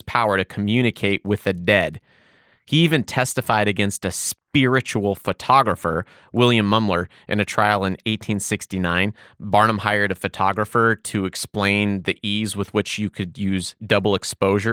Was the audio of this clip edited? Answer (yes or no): no